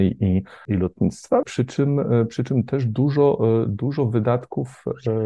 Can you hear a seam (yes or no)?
yes